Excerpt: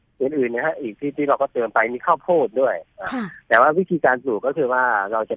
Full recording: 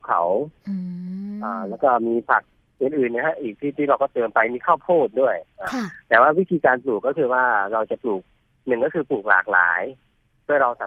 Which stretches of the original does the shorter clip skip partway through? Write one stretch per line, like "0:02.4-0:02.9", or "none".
none